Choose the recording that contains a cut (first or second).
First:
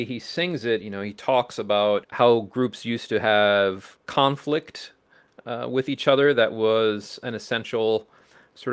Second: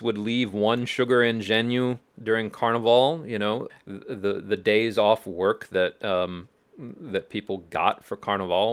second